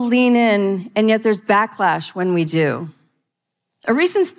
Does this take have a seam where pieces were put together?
no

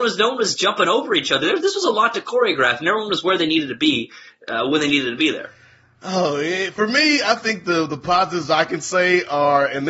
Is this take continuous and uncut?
yes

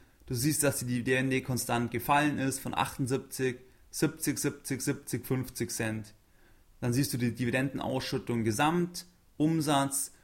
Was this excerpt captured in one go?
yes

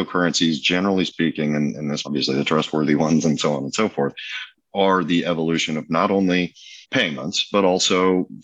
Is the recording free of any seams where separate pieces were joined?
no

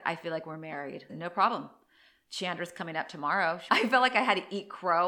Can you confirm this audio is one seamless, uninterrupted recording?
no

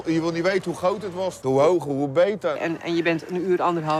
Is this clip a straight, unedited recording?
no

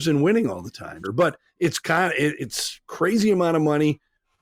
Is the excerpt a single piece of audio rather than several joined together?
no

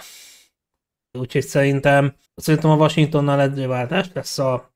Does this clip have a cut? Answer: yes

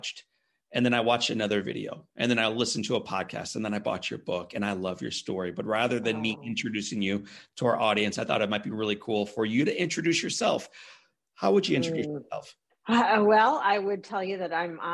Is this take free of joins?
yes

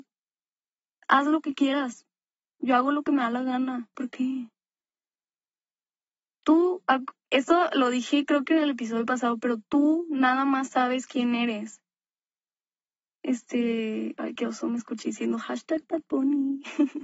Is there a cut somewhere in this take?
yes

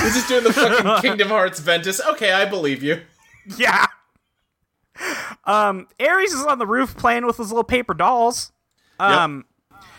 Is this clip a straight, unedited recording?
yes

